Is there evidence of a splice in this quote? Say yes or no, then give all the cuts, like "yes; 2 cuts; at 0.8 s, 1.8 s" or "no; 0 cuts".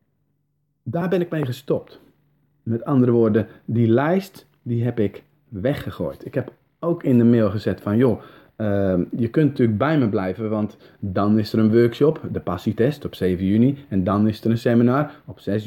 no; 0 cuts